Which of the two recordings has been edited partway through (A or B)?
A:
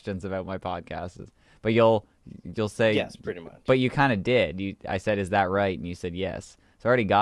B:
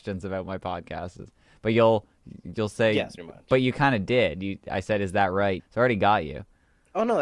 B